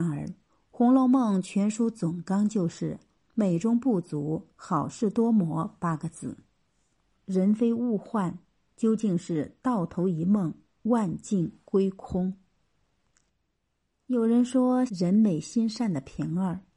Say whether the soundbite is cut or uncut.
cut